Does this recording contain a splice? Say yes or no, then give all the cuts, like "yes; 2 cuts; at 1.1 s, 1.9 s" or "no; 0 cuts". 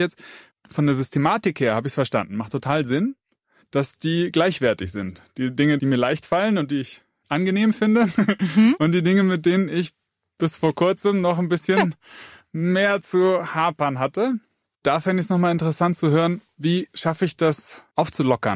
no; 0 cuts